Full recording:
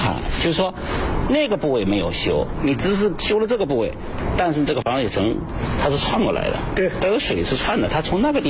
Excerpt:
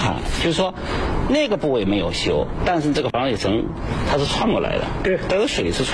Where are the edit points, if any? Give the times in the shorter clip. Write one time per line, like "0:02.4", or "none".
0:02.6

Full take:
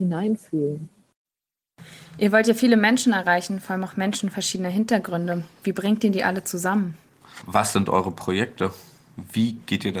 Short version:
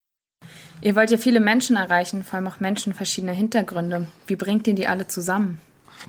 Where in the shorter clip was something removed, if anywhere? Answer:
none

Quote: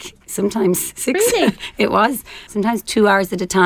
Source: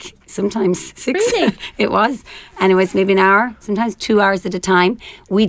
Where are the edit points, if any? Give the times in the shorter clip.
0:02.5

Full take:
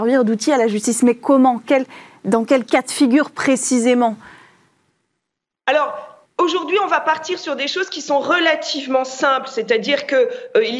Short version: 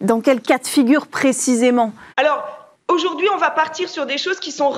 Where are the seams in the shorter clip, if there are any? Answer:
0:02.1

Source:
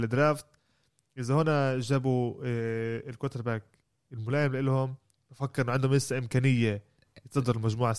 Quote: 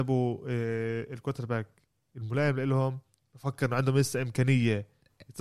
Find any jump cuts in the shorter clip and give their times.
none

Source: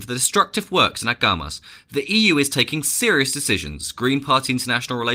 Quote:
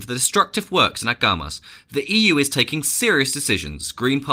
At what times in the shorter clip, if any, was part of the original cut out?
none

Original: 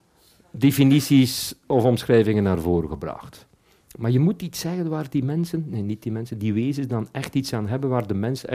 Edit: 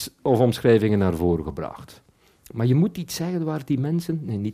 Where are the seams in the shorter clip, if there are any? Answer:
none

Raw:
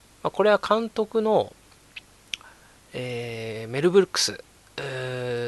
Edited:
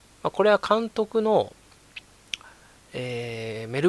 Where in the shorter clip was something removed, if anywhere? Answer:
none

